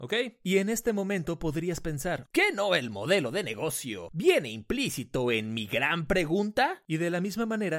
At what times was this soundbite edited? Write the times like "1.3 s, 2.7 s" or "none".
2.3 s, 6.9 s